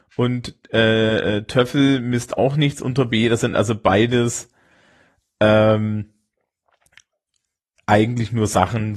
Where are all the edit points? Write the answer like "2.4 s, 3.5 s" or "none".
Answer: none